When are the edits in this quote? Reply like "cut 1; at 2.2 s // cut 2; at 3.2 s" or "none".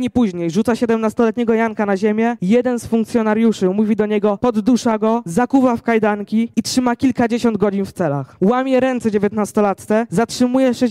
cut 1; at 4.4 s